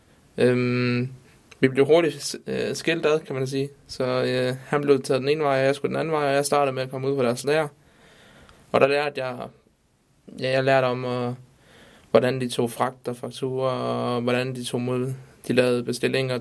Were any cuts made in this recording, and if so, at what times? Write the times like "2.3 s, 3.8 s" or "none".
none